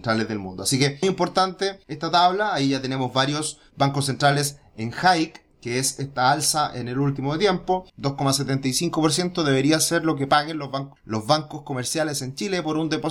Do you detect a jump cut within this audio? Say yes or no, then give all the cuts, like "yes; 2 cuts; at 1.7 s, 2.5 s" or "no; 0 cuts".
yes; 2 cuts; at 1.0 s, 7.9 s